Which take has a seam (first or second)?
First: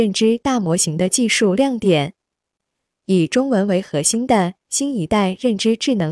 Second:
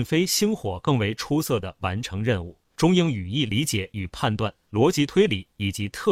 second